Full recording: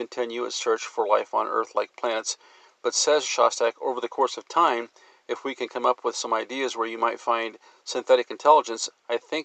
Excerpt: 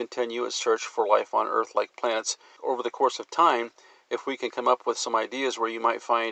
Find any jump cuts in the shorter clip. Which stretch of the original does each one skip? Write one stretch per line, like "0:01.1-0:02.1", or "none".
0:02.6-0:03.7